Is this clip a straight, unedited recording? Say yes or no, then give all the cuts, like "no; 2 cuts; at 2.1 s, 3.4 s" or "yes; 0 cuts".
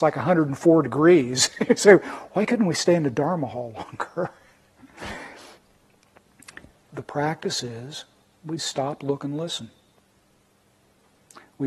no; 2 cuts; at 6.9 s, 8.6 s